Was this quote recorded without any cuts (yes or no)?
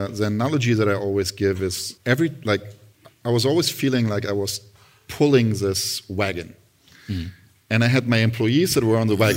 no